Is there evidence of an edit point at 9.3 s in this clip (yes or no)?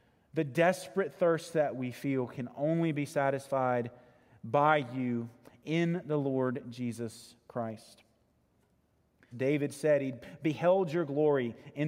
yes